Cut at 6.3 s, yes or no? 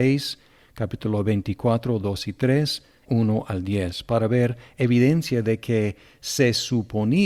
no